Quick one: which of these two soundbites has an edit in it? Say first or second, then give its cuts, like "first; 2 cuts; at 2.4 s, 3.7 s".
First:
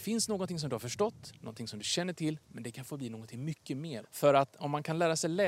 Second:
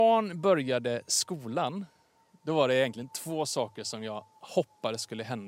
first; 2 cuts; at 1.4 s, 4.0 s